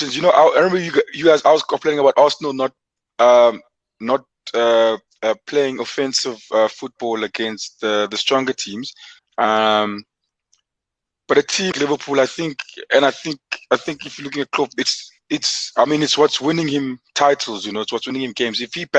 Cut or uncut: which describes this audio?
cut